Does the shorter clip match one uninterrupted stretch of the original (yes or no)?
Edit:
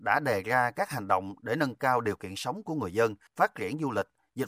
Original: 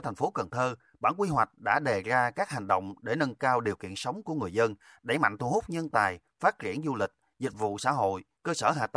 no